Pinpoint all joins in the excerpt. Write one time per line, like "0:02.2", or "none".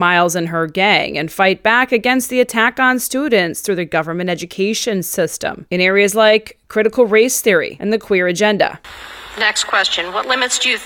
none

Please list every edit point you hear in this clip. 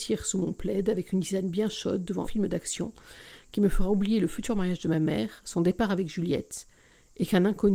0:02.2

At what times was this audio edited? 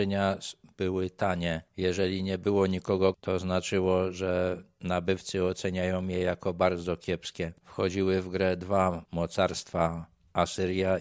0:03.1
0:07.6

